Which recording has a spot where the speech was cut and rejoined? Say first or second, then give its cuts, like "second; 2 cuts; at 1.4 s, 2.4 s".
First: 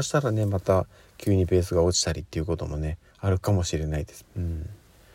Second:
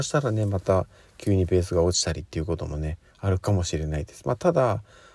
first; 1 cut; at 4.2 s